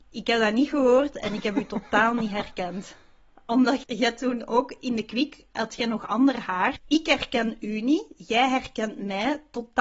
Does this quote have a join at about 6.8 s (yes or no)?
yes